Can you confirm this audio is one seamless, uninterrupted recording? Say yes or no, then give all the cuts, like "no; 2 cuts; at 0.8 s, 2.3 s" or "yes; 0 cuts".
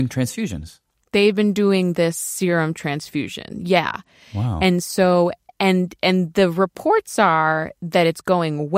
yes; 0 cuts